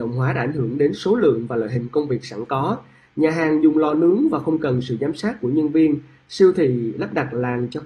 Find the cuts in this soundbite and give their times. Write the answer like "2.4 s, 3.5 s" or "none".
none